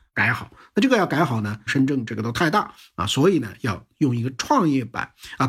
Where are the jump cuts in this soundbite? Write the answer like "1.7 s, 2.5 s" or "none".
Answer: 1.7 s